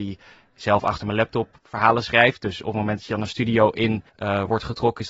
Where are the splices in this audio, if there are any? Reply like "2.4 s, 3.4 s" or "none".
4.1 s